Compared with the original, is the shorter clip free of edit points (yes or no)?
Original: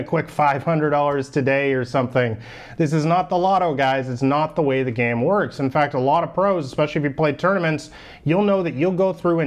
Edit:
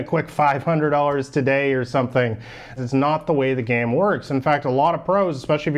no